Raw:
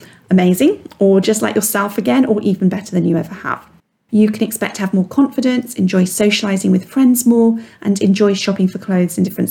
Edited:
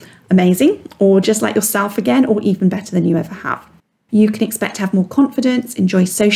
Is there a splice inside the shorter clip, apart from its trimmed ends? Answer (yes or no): no